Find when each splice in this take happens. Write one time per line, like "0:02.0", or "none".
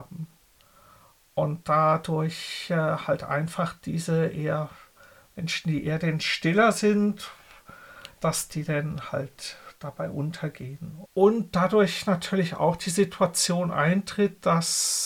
0:11.1